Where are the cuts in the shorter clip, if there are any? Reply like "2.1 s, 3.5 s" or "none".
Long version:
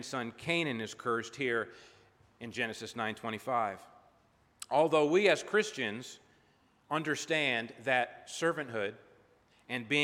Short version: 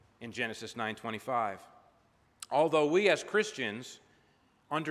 none